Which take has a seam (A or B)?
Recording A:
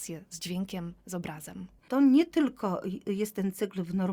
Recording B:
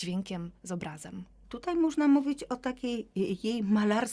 A